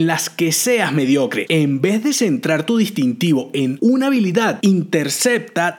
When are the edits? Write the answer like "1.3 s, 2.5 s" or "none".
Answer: 1.5 s